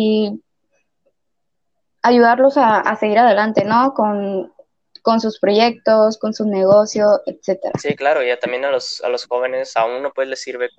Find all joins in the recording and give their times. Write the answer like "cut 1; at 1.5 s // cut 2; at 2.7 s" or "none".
none